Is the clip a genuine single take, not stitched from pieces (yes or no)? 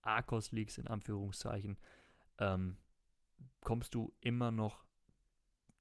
yes